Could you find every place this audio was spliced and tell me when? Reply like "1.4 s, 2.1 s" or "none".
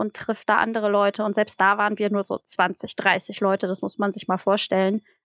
none